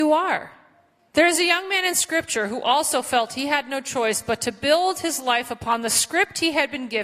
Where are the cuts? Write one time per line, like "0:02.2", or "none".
0:01.1